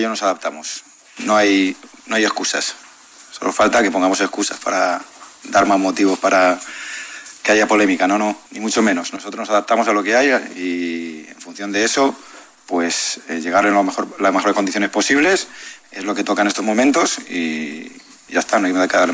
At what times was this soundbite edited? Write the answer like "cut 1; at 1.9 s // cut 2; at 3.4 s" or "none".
cut 1; at 8.5 s